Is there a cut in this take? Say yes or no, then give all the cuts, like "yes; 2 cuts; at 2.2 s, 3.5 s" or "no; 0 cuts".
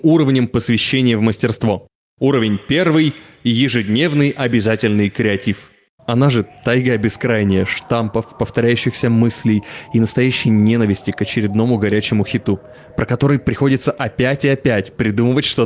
yes; 1 cut; at 6.0 s